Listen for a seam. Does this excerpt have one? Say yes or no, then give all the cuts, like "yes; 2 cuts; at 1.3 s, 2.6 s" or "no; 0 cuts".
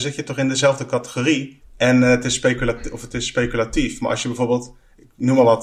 yes; 1 cut; at 1.6 s